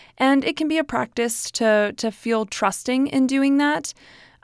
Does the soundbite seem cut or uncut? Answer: uncut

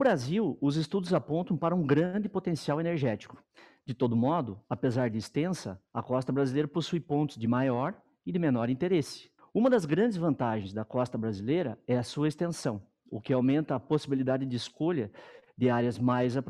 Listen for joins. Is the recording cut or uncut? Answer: cut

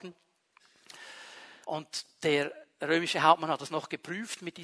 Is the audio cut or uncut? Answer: cut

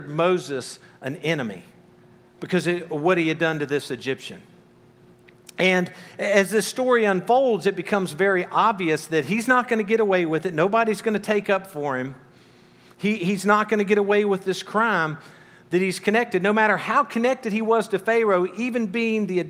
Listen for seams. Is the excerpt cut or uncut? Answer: uncut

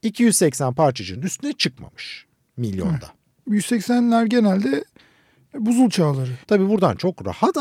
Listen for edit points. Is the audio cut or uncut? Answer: cut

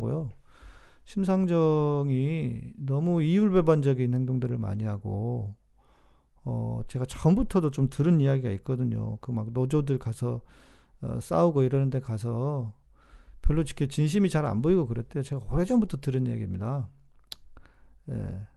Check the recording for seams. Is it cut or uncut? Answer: uncut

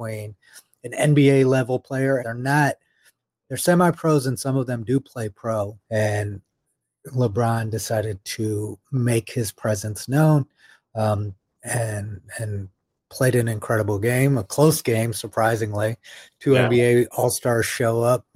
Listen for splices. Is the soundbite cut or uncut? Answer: cut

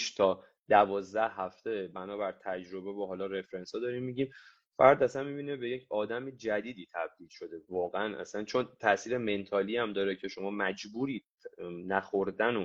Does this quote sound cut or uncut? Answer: cut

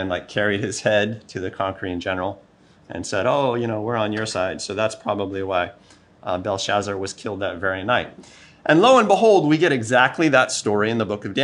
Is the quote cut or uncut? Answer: uncut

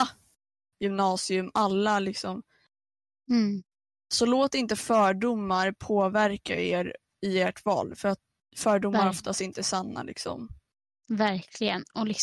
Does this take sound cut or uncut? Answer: uncut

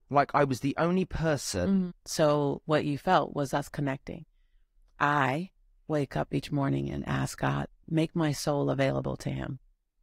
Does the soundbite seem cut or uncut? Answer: cut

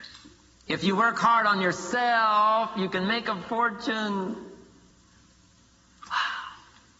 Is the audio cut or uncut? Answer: uncut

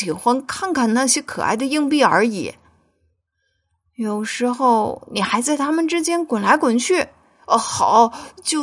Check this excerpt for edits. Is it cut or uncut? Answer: uncut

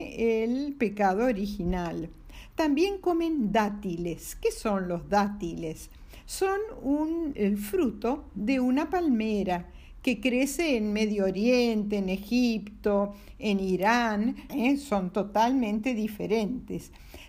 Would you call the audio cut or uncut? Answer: cut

